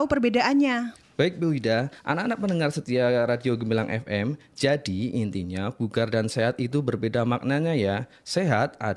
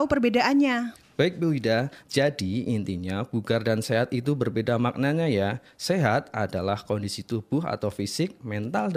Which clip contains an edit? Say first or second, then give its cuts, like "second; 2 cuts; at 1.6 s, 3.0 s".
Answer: second; 1 cut; at 2.0 s